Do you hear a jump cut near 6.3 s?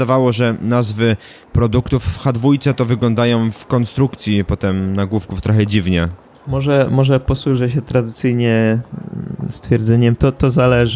no; 0 cuts

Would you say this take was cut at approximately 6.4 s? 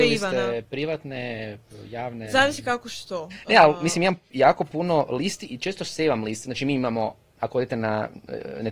yes; 1 cut; at 6.4 s

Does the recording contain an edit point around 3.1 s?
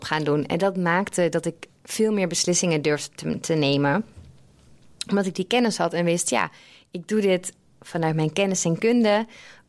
no; 0 cuts

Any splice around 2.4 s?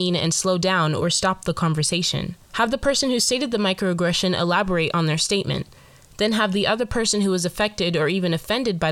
yes; 1 cut; at 2.4 s

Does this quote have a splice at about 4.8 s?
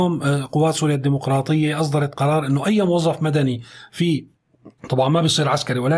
yes; 1 cut; at 4.8 s

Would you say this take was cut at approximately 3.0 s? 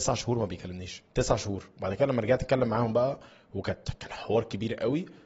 no; 1 cut; at 1.1 s

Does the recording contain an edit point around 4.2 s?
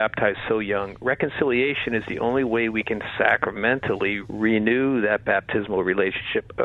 yes; 1 cut; at 4.2 s

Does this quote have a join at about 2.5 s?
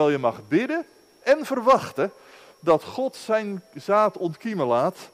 no; 1 cut; at 1.2 s

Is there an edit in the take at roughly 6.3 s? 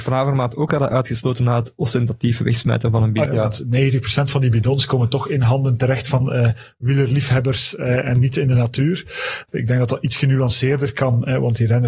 no; 2 cuts; at 3.3 s, 9.5 s

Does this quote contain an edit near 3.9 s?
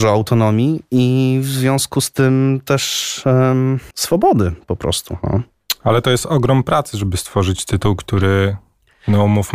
yes; 1 cut; at 3.9 s

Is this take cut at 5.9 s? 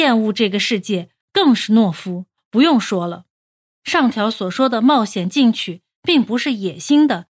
no; 2 cuts; at 1.2 s, 3.7 s

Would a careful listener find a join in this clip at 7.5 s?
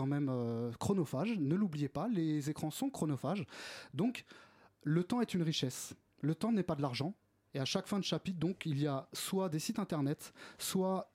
yes; 1 cut; at 7.5 s

